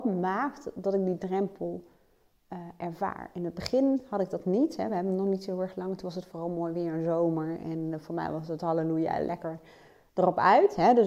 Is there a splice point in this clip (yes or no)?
no